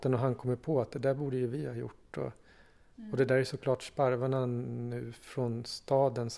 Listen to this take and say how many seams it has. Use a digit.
0